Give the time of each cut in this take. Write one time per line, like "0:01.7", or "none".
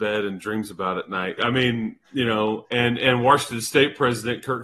0:01.4